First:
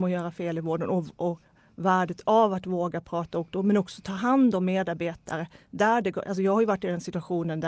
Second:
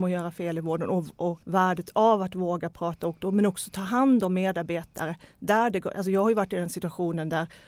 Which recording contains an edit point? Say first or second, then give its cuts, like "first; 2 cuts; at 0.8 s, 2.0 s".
second; 1 cut; at 1.4 s